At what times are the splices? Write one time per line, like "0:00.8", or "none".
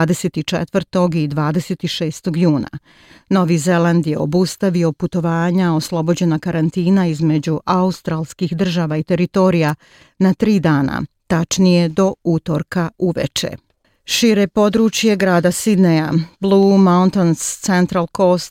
none